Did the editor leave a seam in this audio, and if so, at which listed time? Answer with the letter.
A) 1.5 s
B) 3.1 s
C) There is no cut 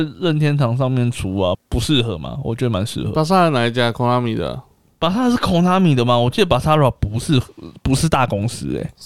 A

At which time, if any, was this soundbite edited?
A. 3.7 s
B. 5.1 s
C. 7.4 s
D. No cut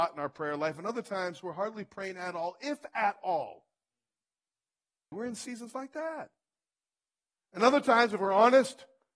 B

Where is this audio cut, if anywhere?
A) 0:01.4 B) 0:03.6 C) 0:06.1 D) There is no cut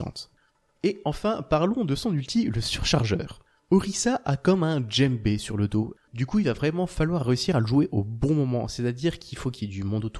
C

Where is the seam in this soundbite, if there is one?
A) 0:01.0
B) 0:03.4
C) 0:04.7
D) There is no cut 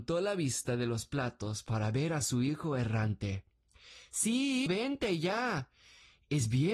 C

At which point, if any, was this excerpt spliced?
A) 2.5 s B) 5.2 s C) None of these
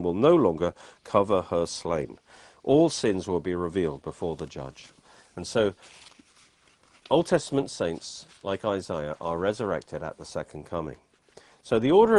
C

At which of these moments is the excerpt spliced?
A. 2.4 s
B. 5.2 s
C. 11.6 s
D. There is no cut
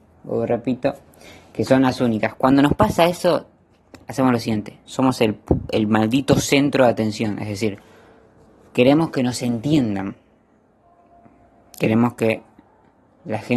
D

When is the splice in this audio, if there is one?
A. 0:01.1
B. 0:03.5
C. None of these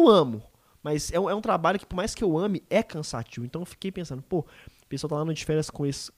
C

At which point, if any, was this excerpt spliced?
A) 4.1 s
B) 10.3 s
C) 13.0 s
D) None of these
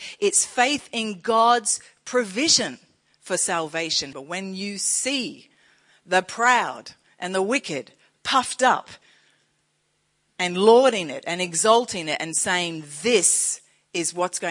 A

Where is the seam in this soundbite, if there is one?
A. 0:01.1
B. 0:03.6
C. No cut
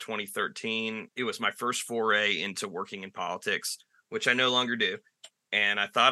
A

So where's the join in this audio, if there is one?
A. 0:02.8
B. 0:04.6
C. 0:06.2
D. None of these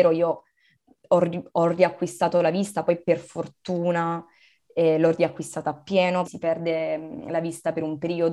C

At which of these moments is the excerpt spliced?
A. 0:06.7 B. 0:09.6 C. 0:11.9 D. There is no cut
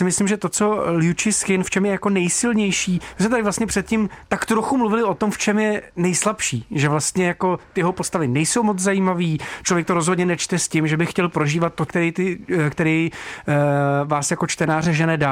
C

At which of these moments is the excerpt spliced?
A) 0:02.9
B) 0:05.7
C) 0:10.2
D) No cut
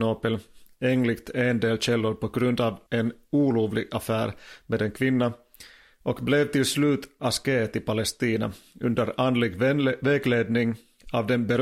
A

